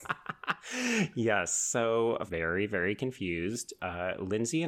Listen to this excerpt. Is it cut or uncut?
cut